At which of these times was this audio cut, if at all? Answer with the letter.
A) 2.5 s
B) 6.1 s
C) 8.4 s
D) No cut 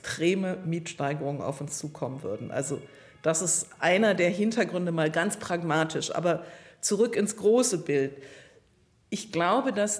D